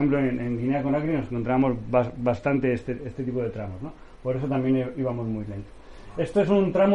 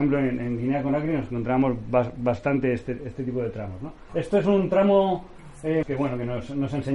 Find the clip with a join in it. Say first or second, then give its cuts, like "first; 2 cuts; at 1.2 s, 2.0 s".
second; 2 cuts; at 4.1 s, 5.8 s